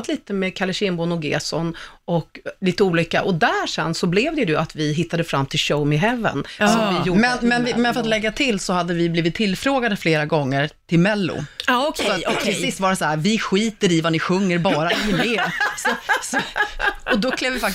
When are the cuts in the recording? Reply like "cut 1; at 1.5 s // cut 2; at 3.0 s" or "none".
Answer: none